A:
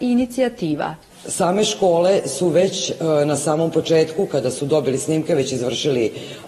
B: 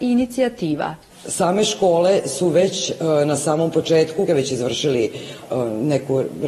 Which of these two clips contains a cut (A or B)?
B